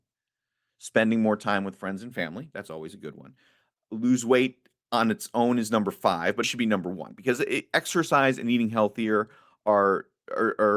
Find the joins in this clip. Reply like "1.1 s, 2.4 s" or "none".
6.4 s